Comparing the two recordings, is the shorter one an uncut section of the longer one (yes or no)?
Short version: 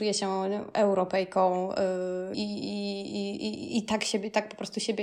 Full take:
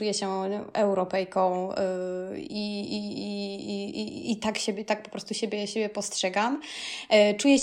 no